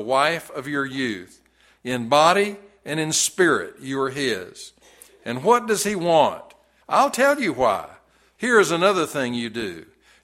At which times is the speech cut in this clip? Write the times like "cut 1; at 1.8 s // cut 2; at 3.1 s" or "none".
cut 1; at 1.8 s // cut 2; at 6.8 s // cut 3; at 8.3 s